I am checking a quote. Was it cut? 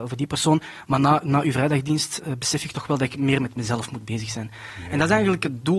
no; 0 cuts

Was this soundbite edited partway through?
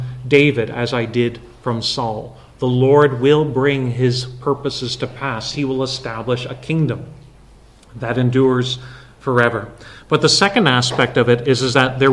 no; 0 cuts

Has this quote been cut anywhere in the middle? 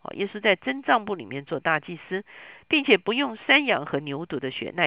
no; 0 cuts

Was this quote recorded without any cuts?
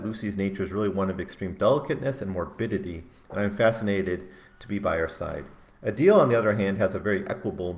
yes; 0 cuts

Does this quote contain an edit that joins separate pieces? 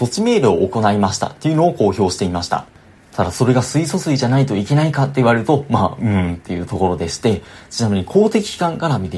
yes; 1 cut; at 3.0 s

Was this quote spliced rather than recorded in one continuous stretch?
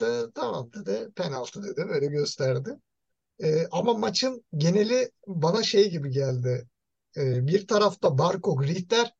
no; 0 cuts

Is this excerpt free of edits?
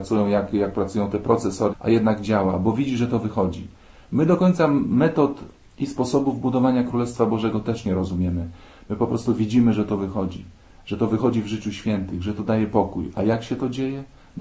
no; 1 cut; at 1.7 s

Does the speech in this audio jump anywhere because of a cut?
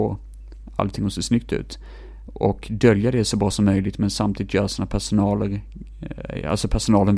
no; 0 cuts

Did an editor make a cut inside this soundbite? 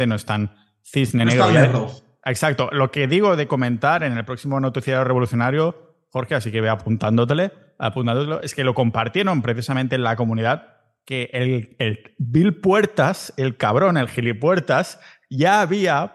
no; 0 cuts

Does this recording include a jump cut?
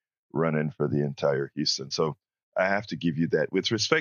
no; 0 cuts

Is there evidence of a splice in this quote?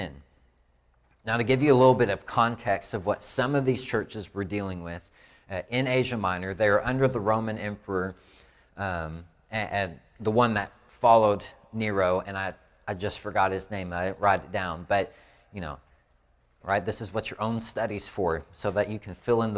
yes; 1 cut; at 16.6 s

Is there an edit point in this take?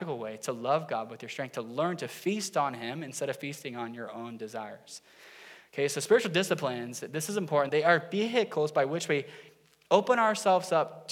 yes; 1 cut; at 7.7 s

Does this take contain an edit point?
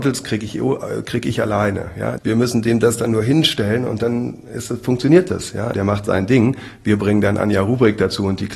yes; 2 cuts; at 2.2 s, 5.7 s

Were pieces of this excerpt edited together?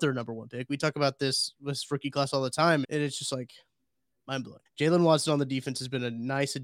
yes; 2 cuts; at 2.8 s, 4.7 s

